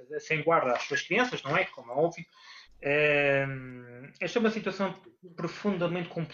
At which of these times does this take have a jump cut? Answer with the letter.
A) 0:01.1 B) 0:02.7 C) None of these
B